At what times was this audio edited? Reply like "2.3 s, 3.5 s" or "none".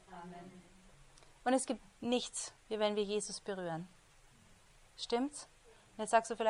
1.8 s